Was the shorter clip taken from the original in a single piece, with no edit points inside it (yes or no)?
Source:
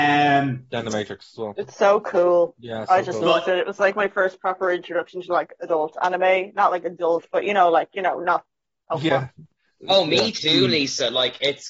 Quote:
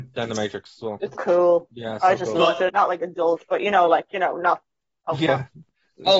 no